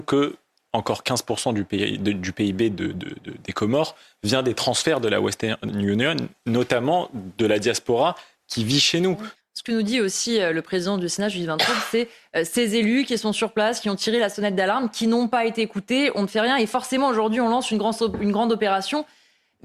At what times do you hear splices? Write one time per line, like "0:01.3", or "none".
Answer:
0:09.4